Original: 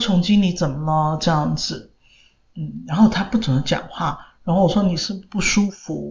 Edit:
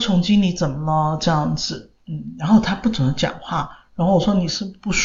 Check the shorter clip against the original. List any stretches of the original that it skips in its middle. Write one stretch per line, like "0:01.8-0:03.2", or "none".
0:02.0-0:02.5